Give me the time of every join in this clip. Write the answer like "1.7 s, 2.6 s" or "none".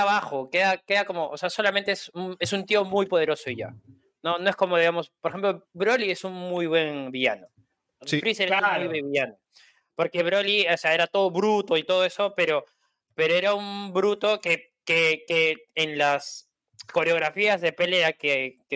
none